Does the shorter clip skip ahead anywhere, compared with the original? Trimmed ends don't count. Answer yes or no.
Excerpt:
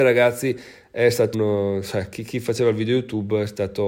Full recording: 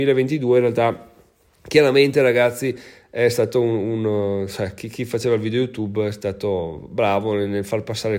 yes